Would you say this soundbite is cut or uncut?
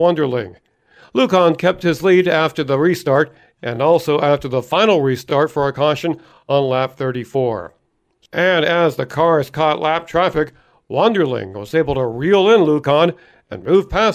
uncut